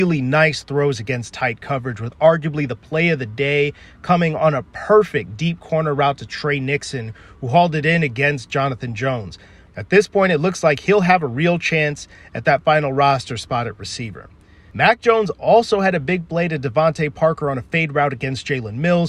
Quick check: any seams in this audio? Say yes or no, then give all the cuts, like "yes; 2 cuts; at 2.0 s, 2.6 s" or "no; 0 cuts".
yes; 1 cut; at 9.7 s